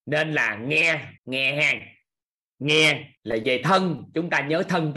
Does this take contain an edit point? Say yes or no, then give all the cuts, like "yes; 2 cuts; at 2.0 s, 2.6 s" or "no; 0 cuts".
yes; 2 cuts; at 1.2 s, 3.2 s